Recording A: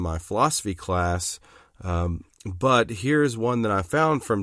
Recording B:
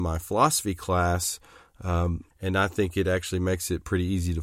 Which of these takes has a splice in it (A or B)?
B